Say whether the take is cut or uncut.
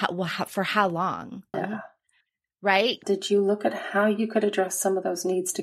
cut